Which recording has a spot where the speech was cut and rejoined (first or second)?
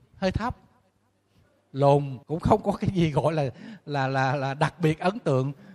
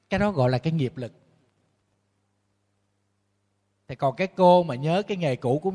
first